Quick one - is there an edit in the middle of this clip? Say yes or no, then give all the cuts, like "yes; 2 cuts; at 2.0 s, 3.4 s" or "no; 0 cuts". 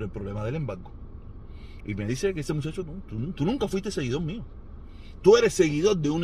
yes; 2 cuts; at 1.8 s, 2.8 s